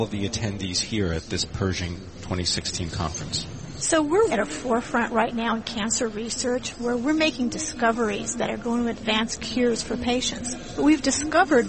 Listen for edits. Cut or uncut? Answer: cut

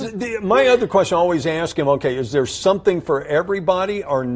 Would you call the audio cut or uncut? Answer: uncut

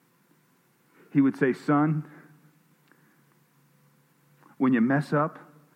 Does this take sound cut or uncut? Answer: uncut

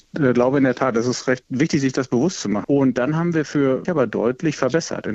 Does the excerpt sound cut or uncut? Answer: cut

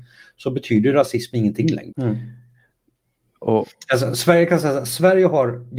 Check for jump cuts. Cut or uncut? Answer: cut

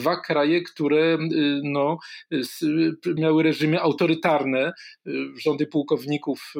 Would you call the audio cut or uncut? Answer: cut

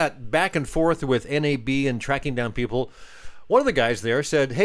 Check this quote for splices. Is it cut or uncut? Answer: uncut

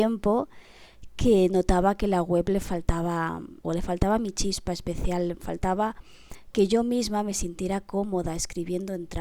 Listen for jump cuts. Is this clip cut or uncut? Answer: cut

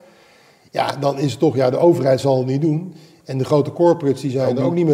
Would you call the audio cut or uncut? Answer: uncut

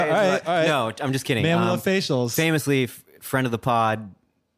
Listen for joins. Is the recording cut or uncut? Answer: uncut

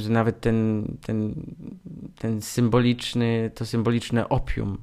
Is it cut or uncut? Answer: uncut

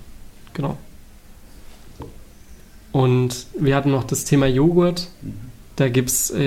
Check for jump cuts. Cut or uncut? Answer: uncut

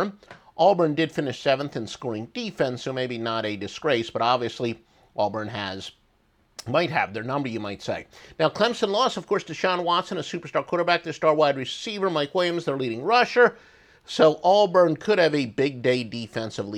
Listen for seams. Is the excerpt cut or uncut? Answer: uncut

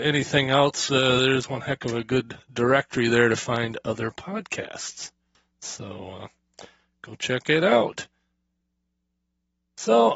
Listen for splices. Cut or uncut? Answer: uncut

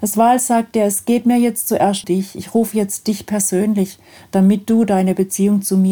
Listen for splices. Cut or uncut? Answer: cut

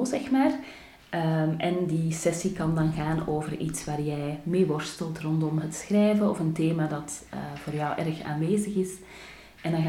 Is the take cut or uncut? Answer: uncut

